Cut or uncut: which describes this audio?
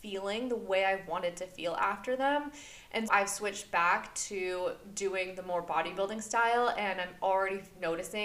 cut